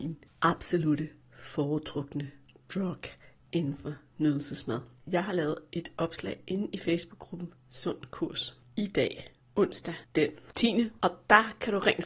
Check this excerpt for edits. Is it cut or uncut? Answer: cut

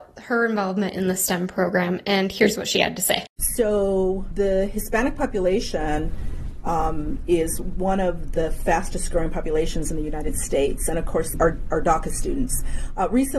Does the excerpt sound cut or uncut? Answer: cut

